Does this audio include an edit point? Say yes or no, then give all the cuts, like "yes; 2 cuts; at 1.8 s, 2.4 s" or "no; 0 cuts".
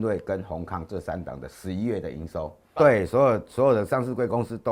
yes; 1 cut; at 2.8 s